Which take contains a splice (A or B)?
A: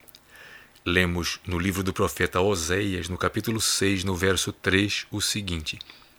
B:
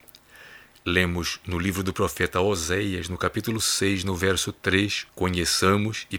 B